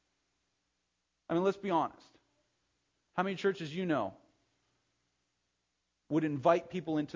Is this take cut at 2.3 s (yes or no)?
no